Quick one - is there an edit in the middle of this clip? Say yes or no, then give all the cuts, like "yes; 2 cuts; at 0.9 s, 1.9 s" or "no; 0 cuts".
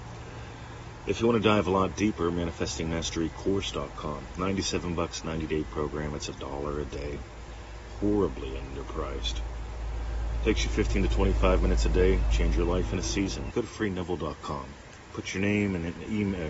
yes; 1 cut; at 13.5 s